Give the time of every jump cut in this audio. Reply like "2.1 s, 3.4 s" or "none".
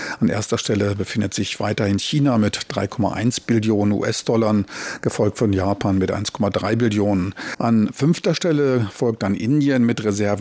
7.6 s